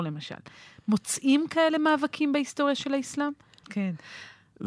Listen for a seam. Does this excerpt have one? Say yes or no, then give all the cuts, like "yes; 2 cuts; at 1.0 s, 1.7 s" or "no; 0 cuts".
yes; 1 cut; at 3.6 s